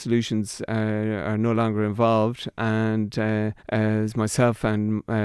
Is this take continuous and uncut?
no; 1 cut; at 3.6 s

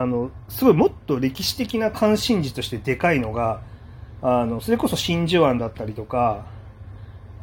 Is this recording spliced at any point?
no; 0 cuts

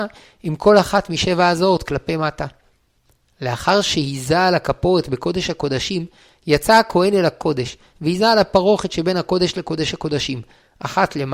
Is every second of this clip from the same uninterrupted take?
yes; 0 cuts

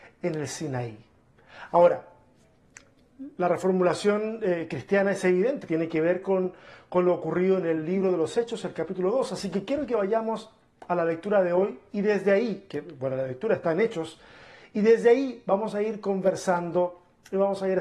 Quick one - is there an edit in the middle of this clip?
no; 0 cuts

